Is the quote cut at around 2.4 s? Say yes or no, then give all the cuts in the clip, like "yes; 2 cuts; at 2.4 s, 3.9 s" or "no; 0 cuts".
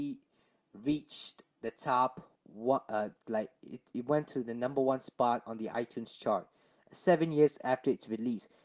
yes; 1 cut; at 2.4 s